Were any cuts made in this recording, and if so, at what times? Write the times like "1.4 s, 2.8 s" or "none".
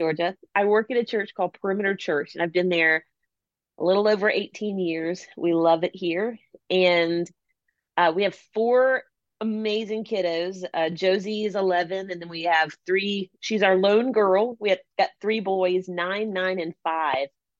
none

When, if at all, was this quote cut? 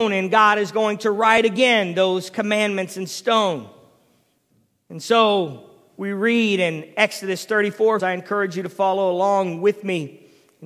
8.0 s

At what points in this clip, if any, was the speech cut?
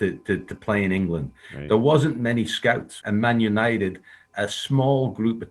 3.0 s

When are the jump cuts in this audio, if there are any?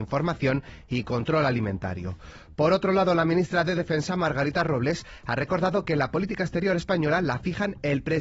none

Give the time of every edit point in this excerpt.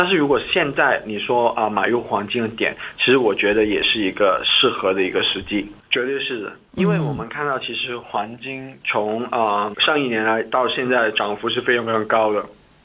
5.8 s, 9.7 s

